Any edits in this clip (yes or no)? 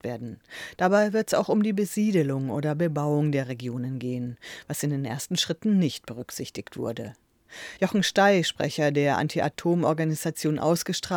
yes